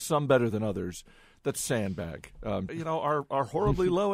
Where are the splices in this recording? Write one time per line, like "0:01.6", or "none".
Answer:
0:02.7